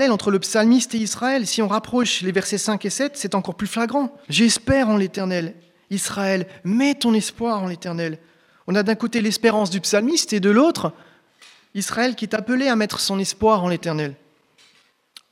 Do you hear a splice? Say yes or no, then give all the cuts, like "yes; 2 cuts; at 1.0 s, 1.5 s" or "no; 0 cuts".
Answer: yes; 1 cut; at 4.2 s